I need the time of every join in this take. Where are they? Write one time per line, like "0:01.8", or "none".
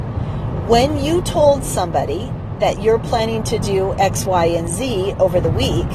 none